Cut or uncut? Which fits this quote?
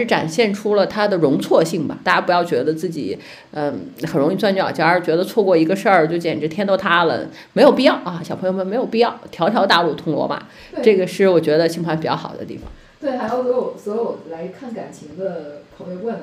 uncut